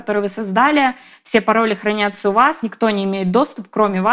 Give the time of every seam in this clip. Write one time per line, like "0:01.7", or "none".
none